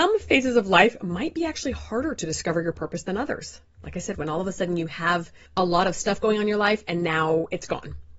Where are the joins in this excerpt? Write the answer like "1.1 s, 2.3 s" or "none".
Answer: 4.1 s, 5.5 s